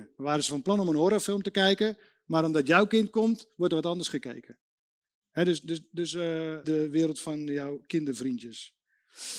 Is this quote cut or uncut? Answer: cut